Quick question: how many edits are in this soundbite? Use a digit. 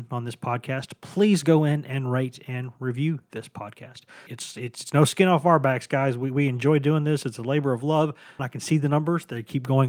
2